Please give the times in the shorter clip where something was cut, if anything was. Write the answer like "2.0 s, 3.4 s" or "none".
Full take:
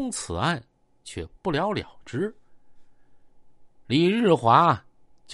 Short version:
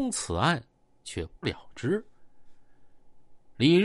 1.4 s